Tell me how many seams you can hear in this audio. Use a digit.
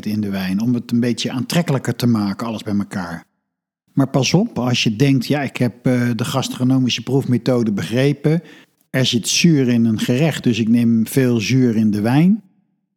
0